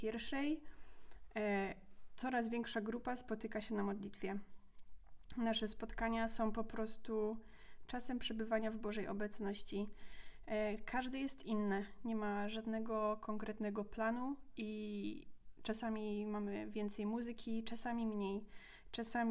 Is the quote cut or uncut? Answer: uncut